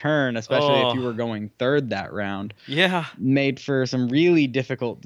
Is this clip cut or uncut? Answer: uncut